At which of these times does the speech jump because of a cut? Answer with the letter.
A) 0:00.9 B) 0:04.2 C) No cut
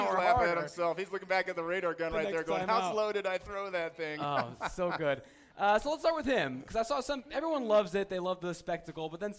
C